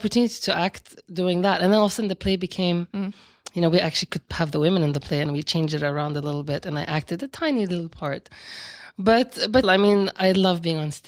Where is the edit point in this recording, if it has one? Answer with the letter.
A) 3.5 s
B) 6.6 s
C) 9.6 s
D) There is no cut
C